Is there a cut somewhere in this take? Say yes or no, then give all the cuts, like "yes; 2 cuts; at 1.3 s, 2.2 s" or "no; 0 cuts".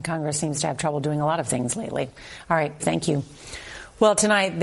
yes; 1 cut; at 2.8 s